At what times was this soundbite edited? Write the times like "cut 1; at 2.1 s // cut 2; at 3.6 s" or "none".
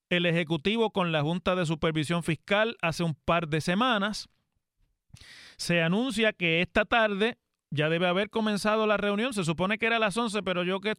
none